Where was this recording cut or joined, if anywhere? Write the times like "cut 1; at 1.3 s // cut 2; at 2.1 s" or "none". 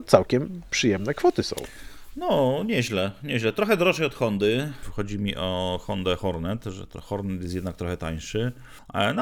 none